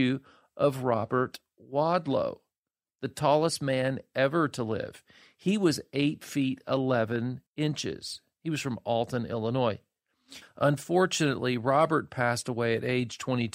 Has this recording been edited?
yes; 2 cuts; at 7.5 s, 10.4 s

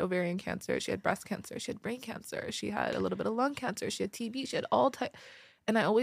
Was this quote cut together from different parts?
no; 0 cuts

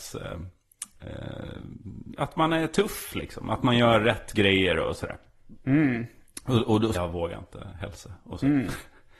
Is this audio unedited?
no; 1 cut; at 6.9 s

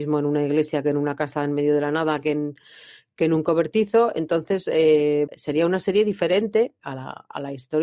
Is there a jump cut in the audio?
yes; 2 cuts; at 5.3 s, 6.8 s

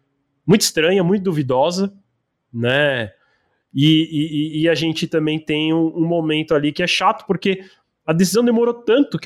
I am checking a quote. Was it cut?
no; 0 cuts

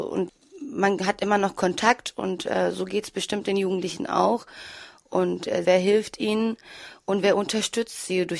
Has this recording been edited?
yes; 1 cut; at 5.6 s

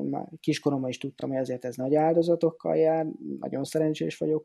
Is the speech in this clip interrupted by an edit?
no; 0 cuts

